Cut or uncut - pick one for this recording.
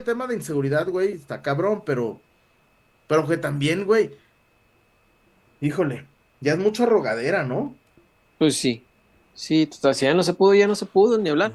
uncut